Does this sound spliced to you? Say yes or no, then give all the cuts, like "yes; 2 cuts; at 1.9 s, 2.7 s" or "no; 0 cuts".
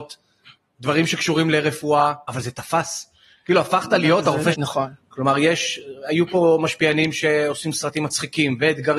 yes; 1 cut; at 4.5 s